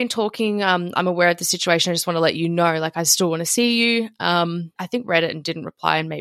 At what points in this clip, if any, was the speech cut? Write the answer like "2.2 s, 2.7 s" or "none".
4.8 s